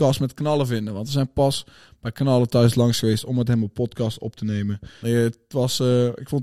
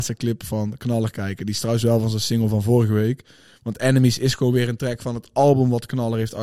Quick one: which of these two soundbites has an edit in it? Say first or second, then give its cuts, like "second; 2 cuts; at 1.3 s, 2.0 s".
first; 1 cut; at 5.0 s